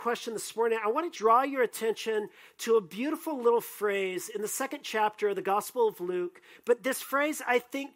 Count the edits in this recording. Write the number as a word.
two